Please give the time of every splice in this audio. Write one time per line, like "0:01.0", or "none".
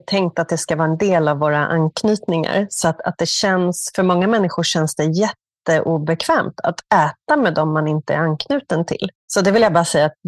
none